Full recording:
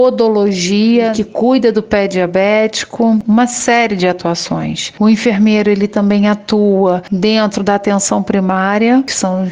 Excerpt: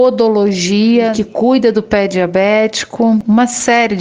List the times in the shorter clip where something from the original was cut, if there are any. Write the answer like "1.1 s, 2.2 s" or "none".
none